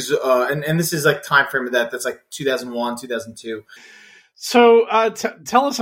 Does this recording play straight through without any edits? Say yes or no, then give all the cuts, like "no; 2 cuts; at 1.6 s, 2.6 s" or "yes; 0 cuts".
no; 1 cut; at 3.8 s